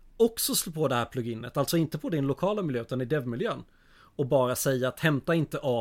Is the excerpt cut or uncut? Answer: uncut